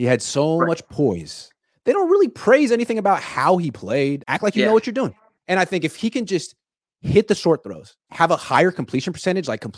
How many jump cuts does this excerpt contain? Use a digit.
2